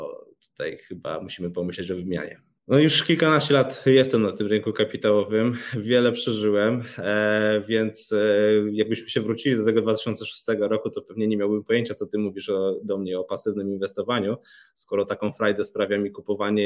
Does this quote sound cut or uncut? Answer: cut